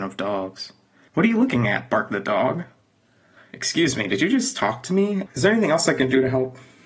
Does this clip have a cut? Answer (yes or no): yes